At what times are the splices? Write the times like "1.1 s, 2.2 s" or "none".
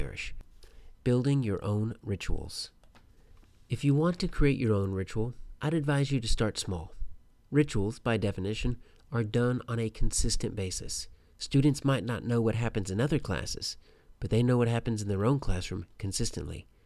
0.9 s, 11.3 s